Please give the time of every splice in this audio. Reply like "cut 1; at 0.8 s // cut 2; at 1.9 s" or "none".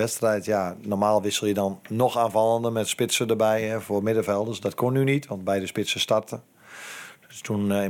none